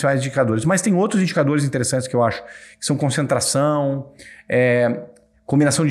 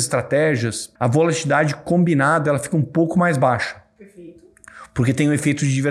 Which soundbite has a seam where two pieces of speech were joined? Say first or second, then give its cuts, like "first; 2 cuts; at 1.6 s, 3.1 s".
second; 1 cut; at 1.0 s